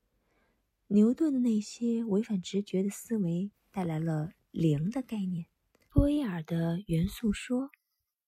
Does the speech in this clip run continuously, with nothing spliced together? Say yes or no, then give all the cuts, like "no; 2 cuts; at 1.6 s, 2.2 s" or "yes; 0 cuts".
no; 2 cuts; at 3.5 s, 5.9 s